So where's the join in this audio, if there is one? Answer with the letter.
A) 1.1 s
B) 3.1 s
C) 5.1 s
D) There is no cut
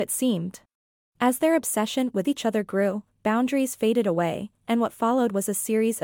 A